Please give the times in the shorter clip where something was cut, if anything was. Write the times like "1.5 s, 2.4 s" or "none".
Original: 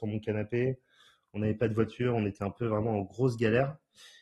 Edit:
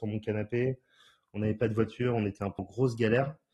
2.6 s